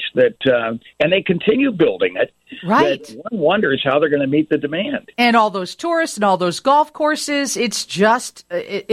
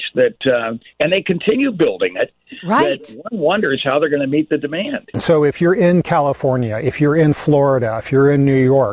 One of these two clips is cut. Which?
second; 1 cut; at 5.1 s

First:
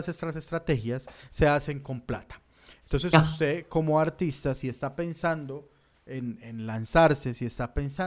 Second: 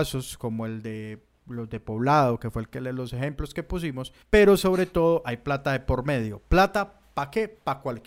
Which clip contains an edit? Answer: second; 1 cut; at 4.2 s

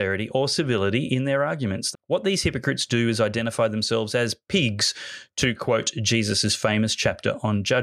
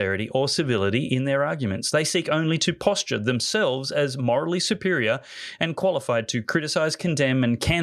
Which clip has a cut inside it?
first; 1 cut; at 1.9 s

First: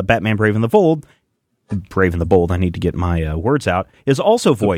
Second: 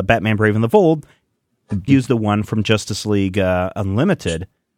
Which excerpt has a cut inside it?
second; 1 cut; at 1.9 s

